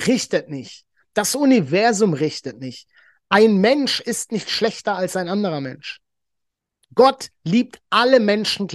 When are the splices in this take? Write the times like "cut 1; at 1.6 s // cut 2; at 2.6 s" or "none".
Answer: none